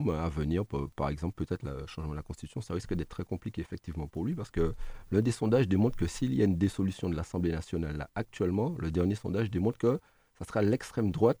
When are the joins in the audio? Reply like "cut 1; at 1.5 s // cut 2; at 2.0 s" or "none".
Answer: none